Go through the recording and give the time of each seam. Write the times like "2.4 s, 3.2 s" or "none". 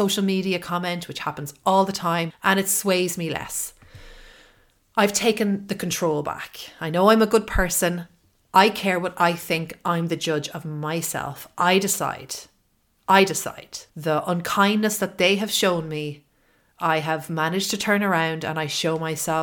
2.3 s, 13.9 s

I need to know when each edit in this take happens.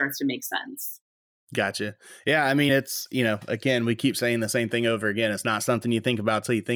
none

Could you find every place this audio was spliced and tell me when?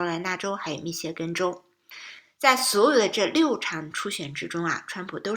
none

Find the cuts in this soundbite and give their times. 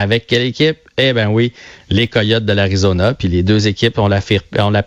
none

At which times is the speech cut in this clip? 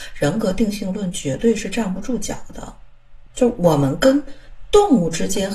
3.3 s

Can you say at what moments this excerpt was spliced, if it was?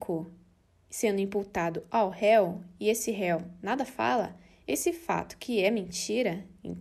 none

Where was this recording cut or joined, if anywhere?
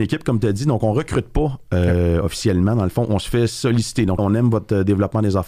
4.2 s

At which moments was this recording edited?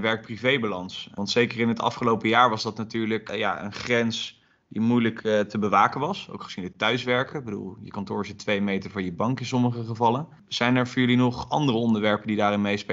none

